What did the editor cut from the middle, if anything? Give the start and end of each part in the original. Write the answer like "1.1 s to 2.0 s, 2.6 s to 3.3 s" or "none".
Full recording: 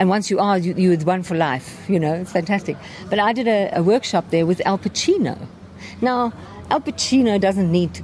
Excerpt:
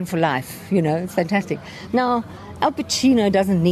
3.0 s to 6.0 s